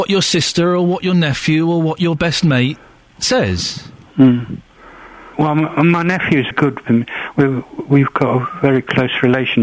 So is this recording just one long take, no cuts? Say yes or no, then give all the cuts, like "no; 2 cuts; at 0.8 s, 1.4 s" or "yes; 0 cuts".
no; 2 cuts; at 5.3 s, 6.5 s